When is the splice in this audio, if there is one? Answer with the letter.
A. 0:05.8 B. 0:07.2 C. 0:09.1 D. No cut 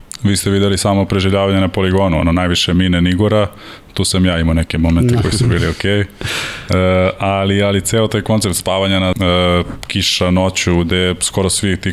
C